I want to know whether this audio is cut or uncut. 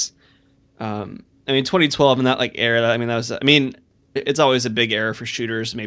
cut